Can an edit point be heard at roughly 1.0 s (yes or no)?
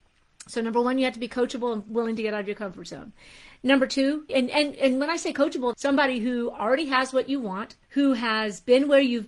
no